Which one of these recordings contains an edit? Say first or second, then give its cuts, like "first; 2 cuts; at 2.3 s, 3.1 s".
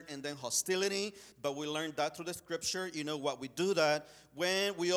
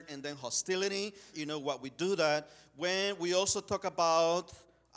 second; 1 cut; at 1.3 s